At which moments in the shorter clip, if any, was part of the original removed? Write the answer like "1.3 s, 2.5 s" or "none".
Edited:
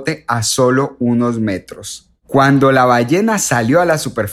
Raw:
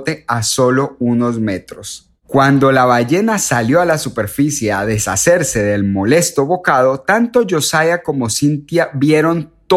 none